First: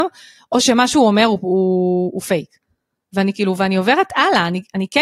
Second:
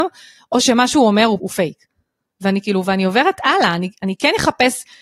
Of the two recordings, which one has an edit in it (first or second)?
second